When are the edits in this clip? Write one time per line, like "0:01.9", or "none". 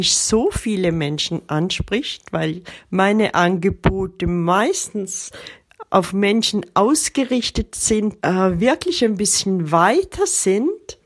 0:08.2